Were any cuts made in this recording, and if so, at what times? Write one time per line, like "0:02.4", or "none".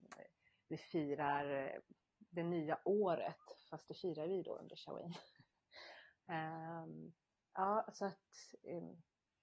none